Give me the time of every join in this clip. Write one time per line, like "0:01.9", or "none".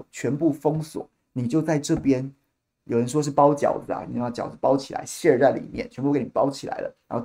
none